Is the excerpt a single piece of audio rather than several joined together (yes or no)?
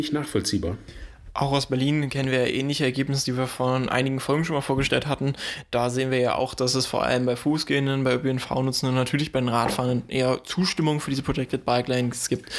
yes